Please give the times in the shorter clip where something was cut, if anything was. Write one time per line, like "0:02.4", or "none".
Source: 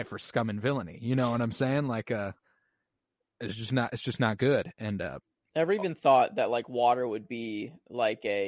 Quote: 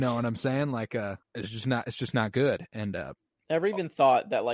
0:01.2